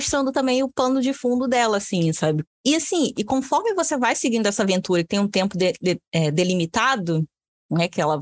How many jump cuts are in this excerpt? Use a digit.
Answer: 1